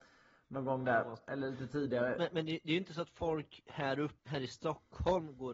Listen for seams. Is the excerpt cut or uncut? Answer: cut